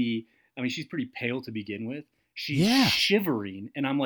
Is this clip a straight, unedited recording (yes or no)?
no